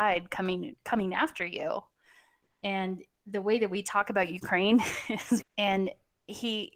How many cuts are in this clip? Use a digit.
1